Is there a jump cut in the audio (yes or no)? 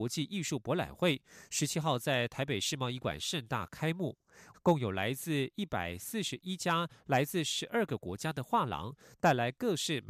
yes